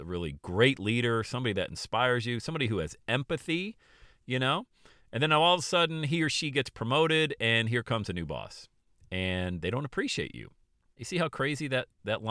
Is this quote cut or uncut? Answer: cut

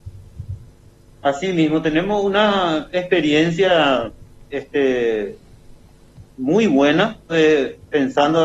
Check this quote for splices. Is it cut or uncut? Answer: cut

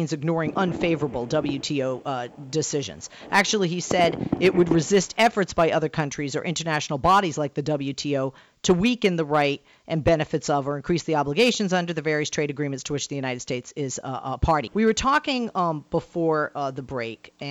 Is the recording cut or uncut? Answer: cut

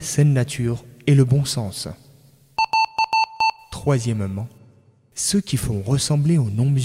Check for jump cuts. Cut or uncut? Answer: uncut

